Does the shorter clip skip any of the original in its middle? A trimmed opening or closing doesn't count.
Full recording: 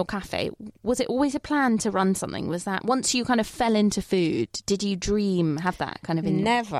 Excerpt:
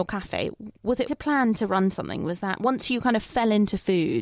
yes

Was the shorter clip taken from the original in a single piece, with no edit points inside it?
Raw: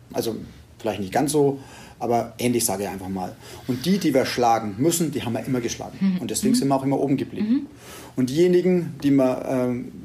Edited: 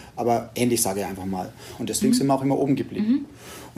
no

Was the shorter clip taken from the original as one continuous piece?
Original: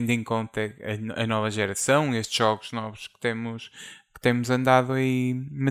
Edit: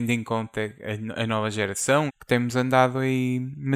no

